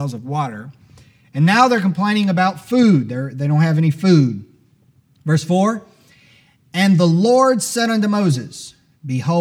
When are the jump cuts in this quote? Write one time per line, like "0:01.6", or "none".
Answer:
none